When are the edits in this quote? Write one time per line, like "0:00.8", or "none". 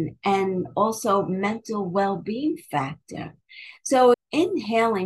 0:04.1